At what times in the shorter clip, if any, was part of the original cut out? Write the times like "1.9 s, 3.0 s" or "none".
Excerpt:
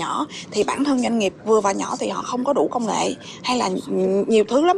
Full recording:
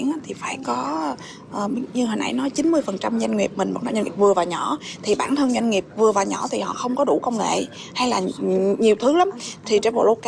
none